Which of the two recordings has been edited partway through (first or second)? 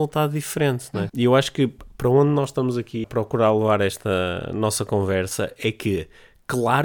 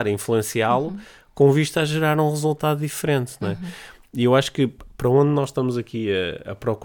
first